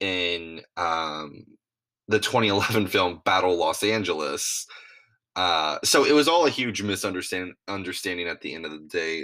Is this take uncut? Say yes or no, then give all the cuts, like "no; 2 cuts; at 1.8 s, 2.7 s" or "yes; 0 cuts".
yes; 0 cuts